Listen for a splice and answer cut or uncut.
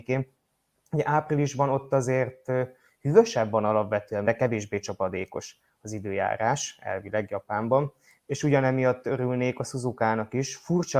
cut